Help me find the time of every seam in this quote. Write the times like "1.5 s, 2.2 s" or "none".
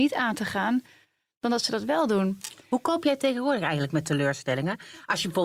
none